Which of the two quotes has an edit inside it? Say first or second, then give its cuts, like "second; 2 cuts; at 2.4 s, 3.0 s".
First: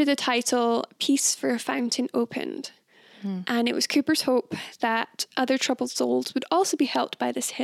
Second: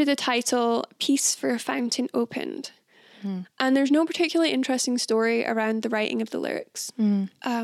second; 1 cut; at 3.4 s